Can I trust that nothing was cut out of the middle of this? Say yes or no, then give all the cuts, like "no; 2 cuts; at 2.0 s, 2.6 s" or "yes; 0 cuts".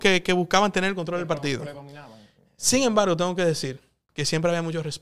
yes; 0 cuts